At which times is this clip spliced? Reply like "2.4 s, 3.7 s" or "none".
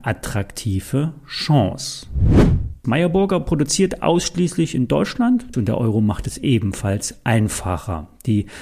2.8 s, 5.5 s